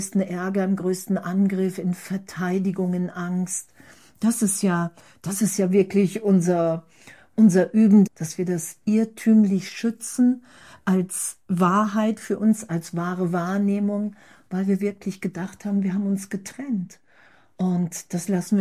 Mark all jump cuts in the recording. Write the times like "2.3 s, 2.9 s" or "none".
8.1 s